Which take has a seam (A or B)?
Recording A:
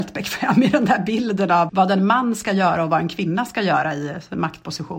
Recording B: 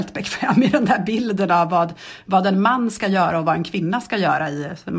A